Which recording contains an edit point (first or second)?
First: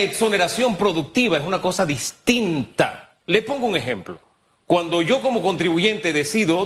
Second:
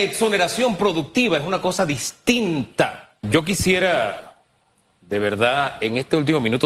second